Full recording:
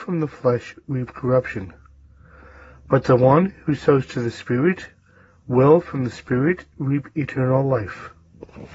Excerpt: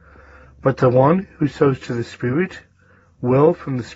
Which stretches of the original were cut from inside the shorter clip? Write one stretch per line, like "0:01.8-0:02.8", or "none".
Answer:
none